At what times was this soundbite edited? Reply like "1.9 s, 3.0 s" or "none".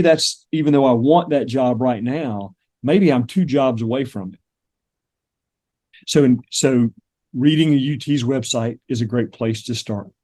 5.9 s